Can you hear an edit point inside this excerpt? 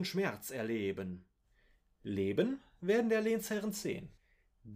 no; 0 cuts

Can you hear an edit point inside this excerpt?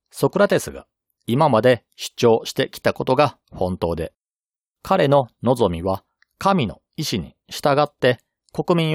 no; 0 cuts

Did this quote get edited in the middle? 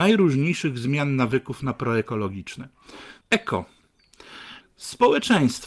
yes; 2 cuts; at 3.2 s, 4.6 s

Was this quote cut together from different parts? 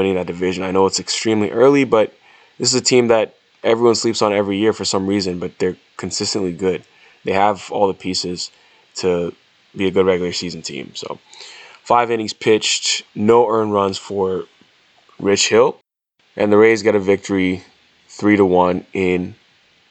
no; 0 cuts

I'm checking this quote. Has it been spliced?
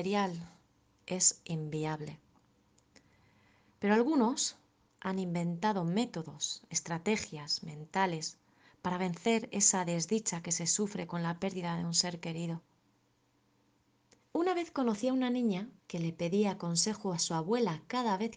yes; 2 cuts; at 14.2 s, 15.8 s

